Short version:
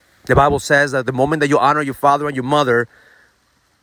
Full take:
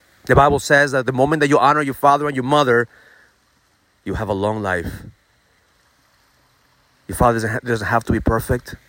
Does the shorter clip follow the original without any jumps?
yes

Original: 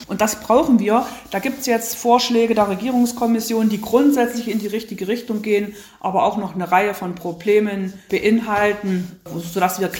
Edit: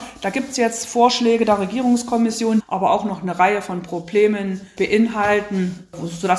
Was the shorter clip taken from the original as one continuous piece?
no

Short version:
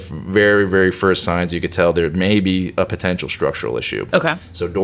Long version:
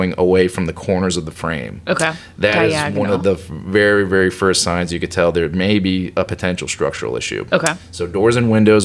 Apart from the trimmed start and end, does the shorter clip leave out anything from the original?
no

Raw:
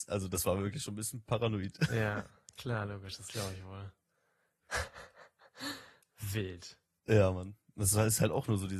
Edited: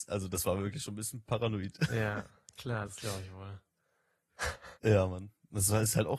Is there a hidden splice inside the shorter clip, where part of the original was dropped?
yes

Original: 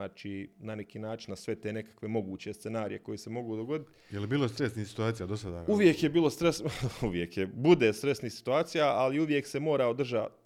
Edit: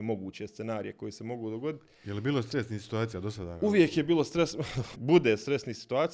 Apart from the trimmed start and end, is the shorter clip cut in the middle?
yes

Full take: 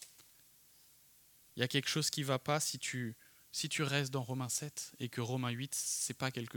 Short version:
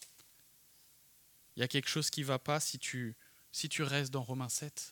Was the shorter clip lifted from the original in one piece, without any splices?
yes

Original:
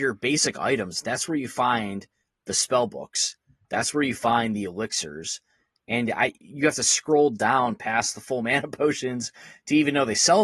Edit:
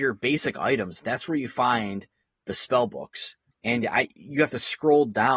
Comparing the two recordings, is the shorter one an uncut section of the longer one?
no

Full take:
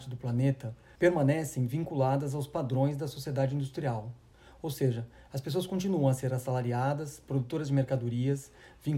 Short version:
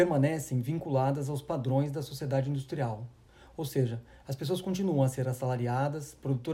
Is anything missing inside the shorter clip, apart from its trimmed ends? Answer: no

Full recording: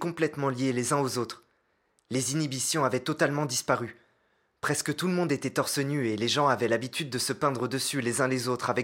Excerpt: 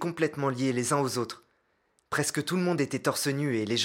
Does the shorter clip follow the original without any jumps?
no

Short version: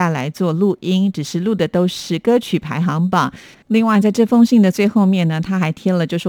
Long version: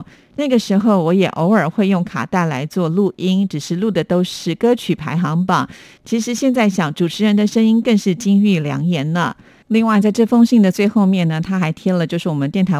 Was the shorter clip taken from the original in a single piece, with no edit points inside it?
no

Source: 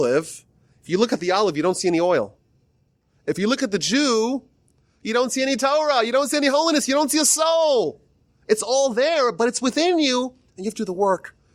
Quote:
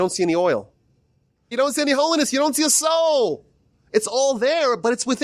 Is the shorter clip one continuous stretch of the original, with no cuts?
no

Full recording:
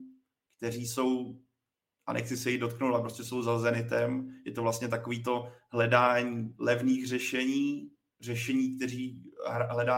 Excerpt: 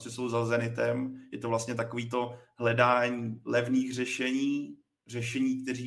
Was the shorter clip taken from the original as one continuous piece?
yes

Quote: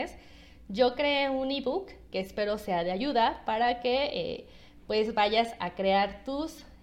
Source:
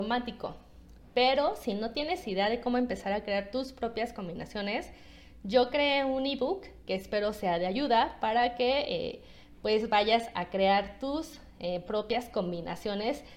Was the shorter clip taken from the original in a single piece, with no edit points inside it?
yes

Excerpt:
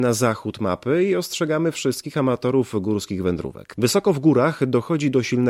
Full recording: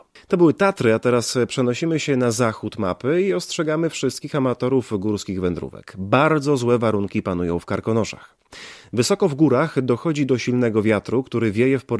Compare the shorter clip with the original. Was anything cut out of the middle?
yes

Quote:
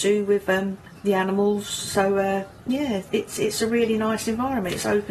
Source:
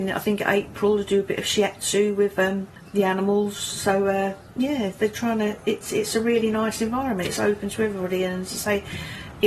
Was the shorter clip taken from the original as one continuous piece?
no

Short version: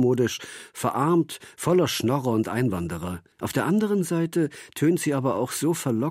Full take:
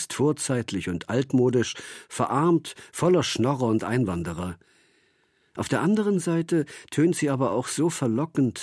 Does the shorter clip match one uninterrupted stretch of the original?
no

